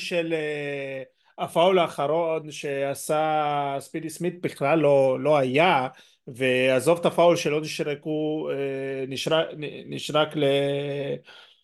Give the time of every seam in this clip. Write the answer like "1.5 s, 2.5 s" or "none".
none